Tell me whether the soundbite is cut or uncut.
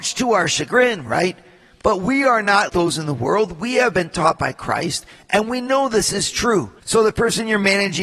cut